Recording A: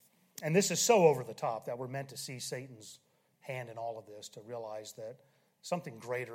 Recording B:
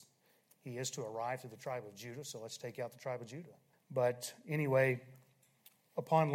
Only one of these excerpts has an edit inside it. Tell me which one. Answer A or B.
B